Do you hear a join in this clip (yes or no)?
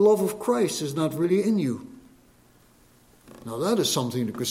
no